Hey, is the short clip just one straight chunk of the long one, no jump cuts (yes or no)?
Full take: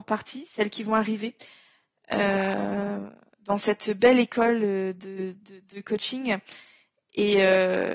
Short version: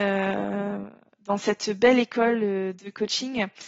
no